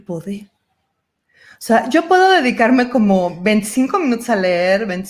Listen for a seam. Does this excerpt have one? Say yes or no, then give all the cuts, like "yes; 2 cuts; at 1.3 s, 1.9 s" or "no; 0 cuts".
no; 0 cuts